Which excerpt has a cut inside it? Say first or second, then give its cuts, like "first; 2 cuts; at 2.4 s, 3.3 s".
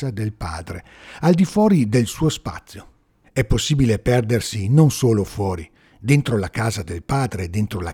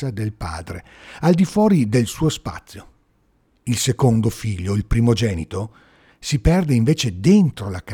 first; 2 cuts; at 3.2 s, 5.8 s